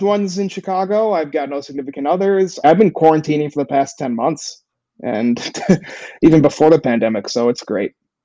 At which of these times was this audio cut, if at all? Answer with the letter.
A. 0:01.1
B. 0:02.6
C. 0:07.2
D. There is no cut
B